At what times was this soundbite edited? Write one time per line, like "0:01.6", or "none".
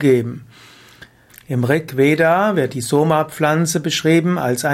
0:01.3